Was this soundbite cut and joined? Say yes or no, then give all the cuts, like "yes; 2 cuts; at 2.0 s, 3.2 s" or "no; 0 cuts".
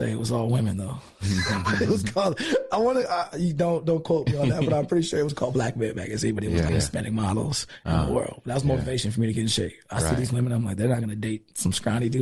yes; 1 cut; at 6.7 s